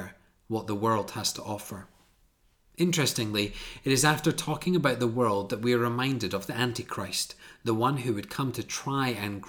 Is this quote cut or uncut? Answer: uncut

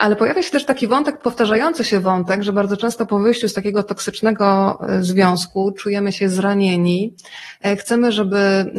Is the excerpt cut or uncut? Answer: uncut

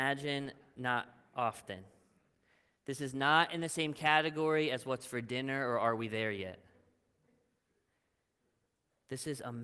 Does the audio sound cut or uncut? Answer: uncut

